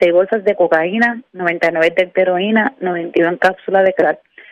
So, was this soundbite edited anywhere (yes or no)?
no